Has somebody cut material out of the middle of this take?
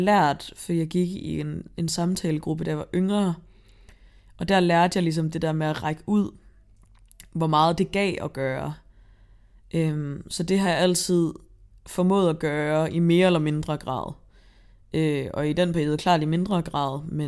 no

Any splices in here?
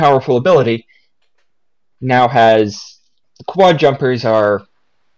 no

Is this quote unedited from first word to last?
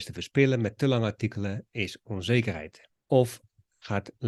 no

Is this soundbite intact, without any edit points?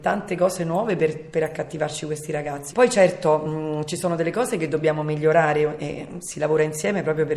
no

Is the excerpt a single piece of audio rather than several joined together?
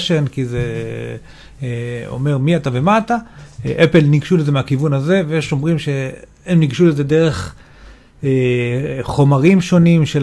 yes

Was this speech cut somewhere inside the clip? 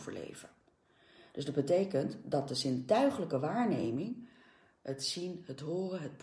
no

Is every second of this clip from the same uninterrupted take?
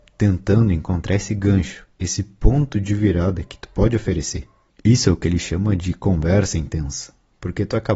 yes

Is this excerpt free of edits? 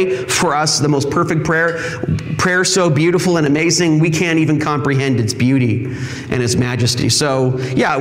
yes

